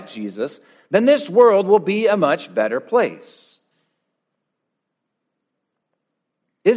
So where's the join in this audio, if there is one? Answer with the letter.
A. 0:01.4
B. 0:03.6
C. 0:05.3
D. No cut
D